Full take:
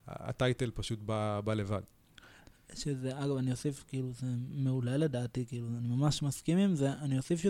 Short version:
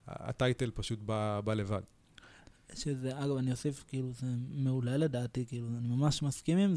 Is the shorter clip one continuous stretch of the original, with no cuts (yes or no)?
yes